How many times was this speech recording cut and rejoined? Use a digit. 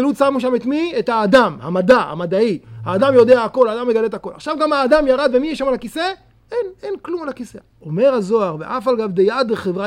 2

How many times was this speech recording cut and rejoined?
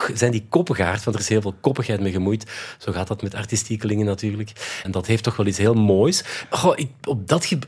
2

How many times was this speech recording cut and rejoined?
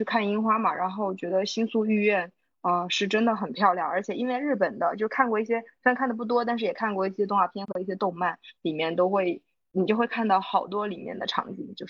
0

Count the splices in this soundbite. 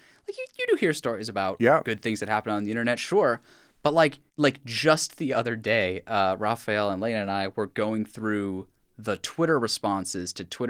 1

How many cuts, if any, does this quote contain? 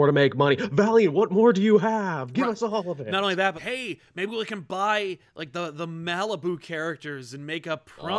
1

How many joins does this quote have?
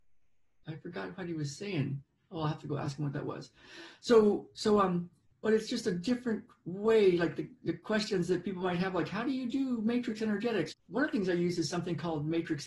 2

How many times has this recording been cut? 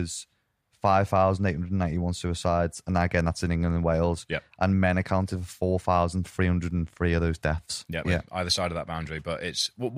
1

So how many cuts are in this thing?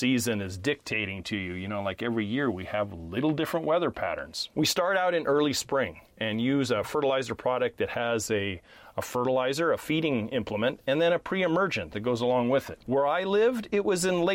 2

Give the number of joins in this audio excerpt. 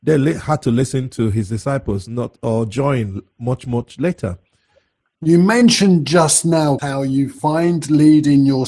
2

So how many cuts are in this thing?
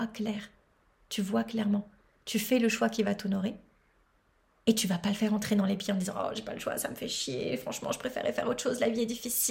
0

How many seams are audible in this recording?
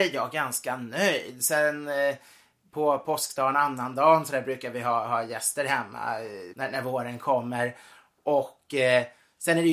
1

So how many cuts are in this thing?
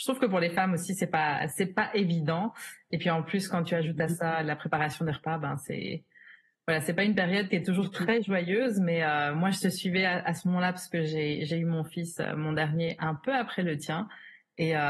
0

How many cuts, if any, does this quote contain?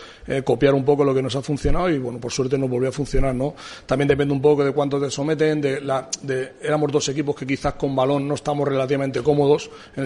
0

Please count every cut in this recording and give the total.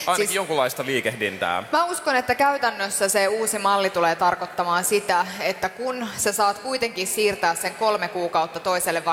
0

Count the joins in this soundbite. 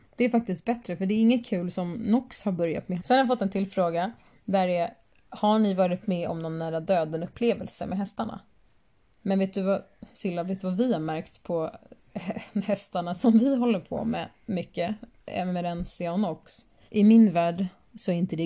3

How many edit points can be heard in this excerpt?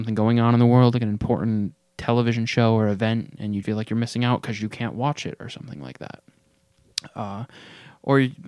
1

